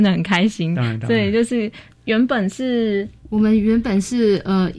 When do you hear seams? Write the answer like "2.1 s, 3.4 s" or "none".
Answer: 3.2 s